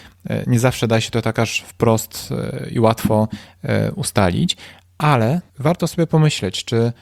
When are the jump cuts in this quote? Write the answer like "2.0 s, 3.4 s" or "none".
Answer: 5.5 s

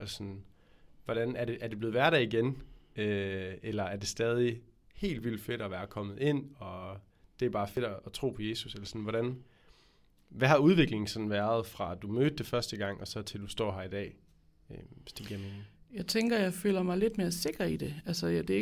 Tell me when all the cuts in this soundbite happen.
none

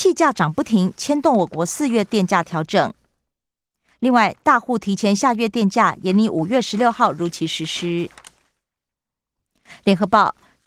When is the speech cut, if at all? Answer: none

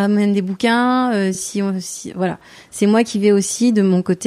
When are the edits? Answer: none

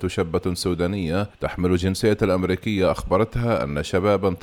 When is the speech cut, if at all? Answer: 1.3 s

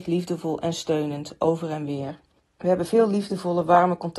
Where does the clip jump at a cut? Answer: 2.4 s

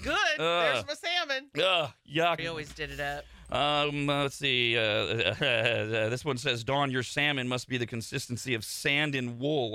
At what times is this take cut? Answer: 2.4 s

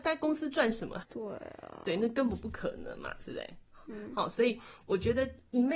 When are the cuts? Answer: 1.0 s

